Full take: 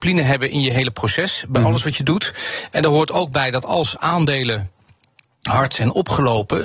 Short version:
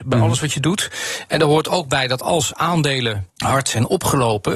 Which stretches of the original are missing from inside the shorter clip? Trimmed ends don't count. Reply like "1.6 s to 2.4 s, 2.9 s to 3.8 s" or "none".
4.7 s to 5.4 s